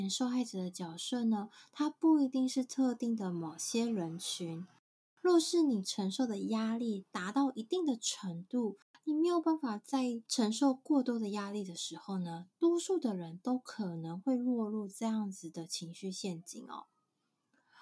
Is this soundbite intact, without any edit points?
yes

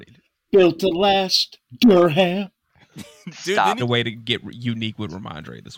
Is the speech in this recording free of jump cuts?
no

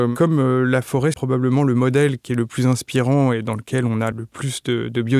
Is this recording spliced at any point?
yes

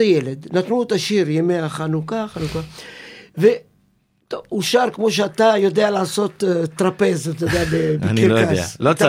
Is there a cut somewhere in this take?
no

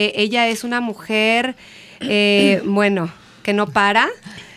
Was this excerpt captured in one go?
yes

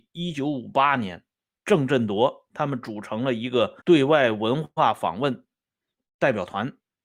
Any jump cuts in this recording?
yes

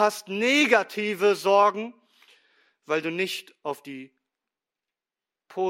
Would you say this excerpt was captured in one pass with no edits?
yes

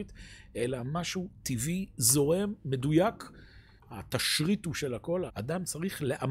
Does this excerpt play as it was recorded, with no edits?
no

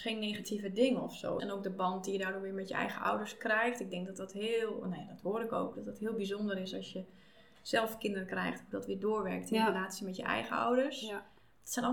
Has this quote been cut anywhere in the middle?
yes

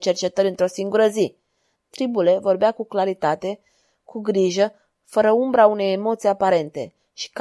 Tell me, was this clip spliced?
yes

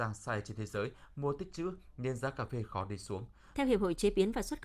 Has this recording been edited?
yes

